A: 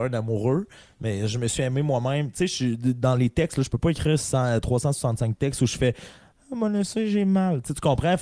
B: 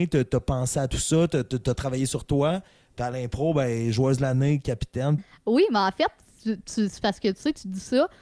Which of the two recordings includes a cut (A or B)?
B